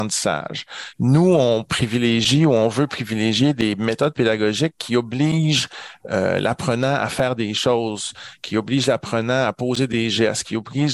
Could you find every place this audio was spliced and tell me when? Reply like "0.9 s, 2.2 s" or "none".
0.9 s